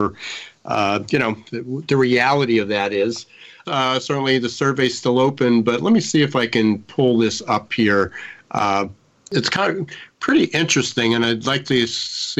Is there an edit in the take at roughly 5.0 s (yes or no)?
no